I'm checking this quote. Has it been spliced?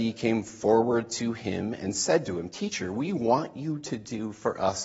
no; 0 cuts

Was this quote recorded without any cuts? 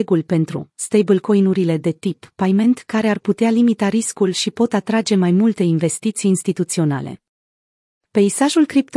yes; 0 cuts

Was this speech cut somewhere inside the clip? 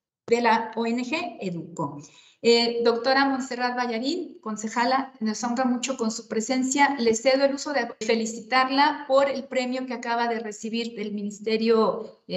yes; 1 cut; at 8.0 s

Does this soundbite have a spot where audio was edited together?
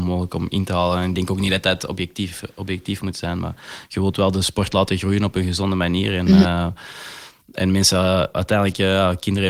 no; 0 cuts

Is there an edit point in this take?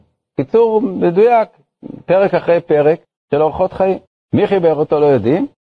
no; 0 cuts

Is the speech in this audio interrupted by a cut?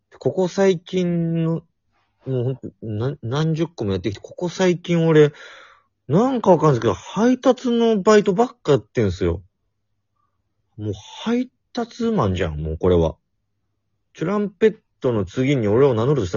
no; 0 cuts

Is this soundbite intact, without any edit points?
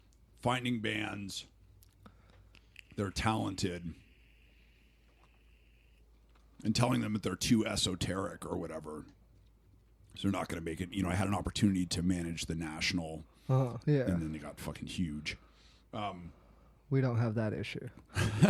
no; 1 cut; at 13.8 s

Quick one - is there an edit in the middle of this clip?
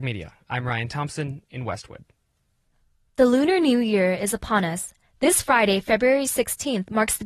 no; 0 cuts

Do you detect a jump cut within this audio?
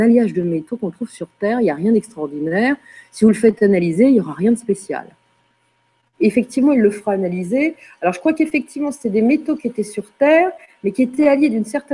no; 0 cuts

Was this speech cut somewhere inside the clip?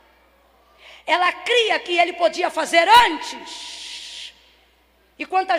no; 0 cuts

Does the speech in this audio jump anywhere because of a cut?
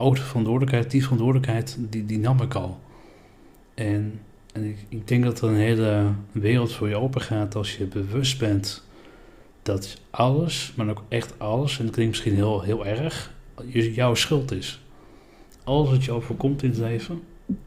no; 0 cuts

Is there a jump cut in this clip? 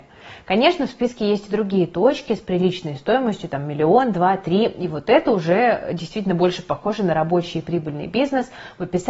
no; 0 cuts

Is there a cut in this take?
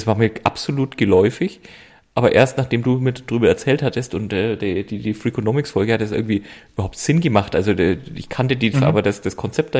yes; 1 cut; at 8.7 s

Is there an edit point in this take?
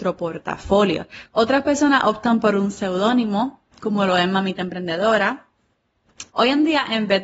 yes; 2 cuts; at 1.3 s, 6.3 s

